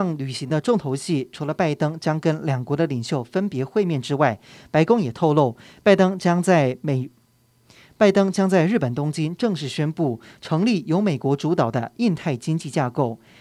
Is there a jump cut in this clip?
no; 0 cuts

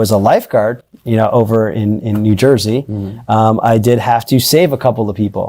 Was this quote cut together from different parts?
no; 0 cuts

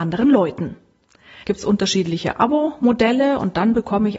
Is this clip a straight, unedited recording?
no; 1 cut; at 1.4 s

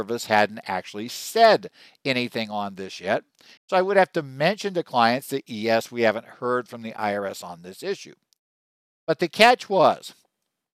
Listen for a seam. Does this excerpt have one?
yes; 1 cut; at 3.6 s

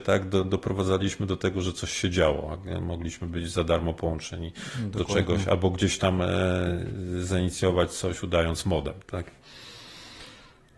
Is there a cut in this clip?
no; 0 cuts

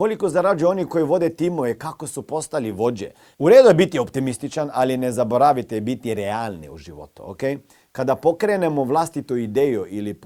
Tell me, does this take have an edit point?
yes; 1 cut; at 3.3 s

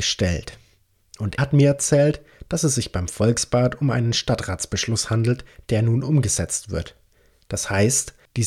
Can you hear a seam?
yes; 1 cut; at 1.4 s

